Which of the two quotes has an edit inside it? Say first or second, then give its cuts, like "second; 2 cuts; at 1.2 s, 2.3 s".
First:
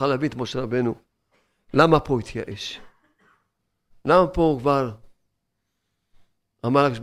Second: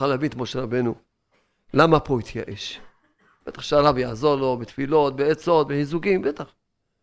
second; 1 cut; at 3.4 s